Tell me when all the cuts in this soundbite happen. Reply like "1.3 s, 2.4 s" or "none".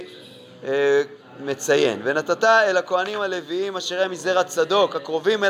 none